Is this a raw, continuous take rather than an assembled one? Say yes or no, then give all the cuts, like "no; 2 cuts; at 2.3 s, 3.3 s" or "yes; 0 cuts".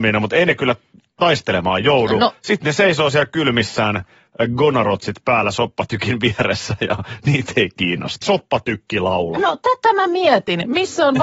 no; 1 cut; at 8.2 s